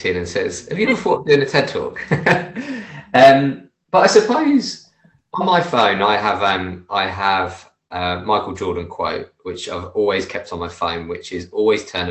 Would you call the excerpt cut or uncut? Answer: uncut